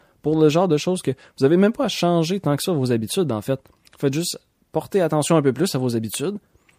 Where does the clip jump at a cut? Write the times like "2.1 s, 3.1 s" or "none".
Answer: none